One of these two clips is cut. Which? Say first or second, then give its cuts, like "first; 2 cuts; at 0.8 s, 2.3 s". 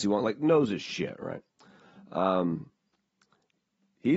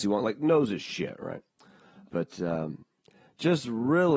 second; 1 cut; at 2.1 s